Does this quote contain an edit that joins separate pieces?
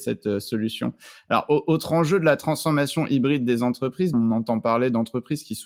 yes; 1 cut; at 4.1 s

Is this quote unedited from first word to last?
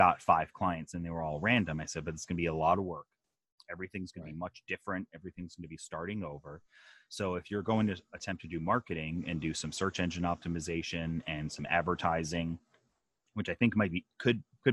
yes; 0 cuts

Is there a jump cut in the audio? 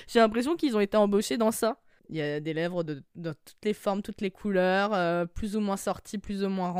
yes; 1 cut; at 2.0 s

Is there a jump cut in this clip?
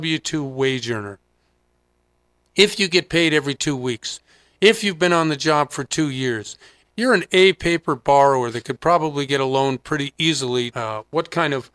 yes; 2 cuts; at 6.8 s, 10.7 s

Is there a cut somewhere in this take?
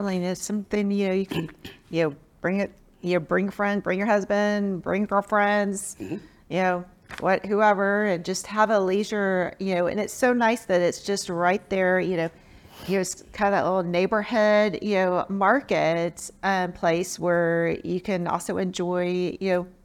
no; 0 cuts

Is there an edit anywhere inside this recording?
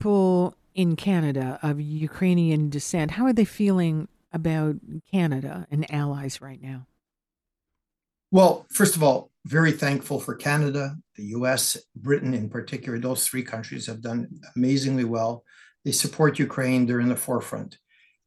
no; 0 cuts

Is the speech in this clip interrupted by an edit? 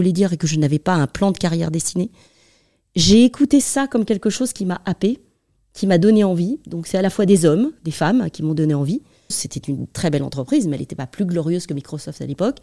yes; 1 cut; at 9.3 s

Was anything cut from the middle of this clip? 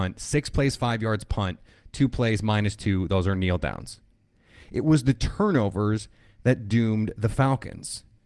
no; 0 cuts

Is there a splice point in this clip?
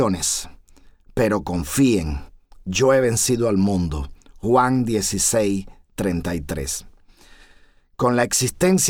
no; 0 cuts

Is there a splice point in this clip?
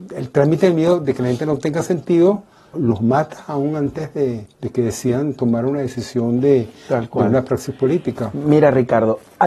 yes; 2 cuts; at 2.7 s, 4.5 s

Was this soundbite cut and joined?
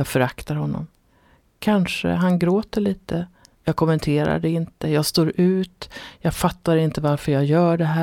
no; 0 cuts

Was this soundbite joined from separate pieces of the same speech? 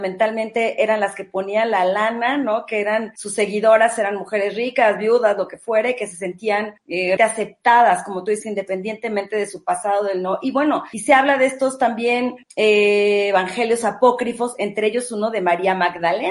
yes; 1 cut; at 7.2 s

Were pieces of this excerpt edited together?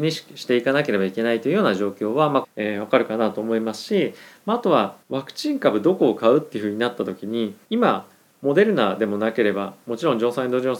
yes; 3 cuts; at 2.4 s, 5.0 s, 7.6 s

